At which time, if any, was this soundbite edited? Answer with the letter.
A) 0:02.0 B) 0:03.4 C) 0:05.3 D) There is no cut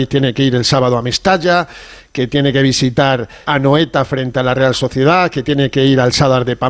B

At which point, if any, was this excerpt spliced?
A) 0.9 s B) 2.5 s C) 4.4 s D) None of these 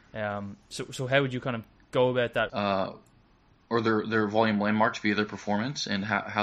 B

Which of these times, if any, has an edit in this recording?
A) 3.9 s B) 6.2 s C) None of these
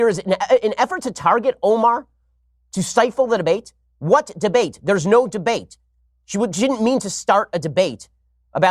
C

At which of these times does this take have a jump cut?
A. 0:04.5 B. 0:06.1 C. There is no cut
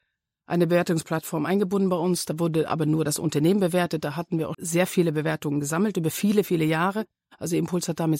A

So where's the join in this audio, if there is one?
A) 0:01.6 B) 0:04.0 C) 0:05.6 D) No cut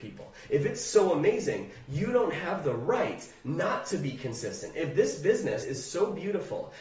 C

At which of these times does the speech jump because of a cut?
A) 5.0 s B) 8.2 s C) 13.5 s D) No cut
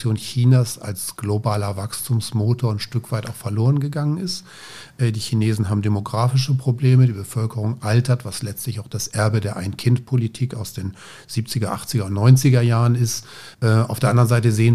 C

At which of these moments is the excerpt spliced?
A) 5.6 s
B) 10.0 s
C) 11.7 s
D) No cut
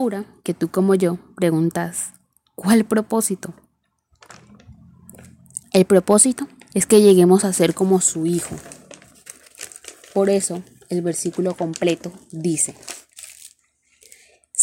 D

